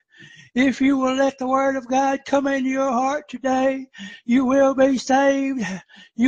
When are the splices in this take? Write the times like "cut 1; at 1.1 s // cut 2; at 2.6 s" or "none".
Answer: none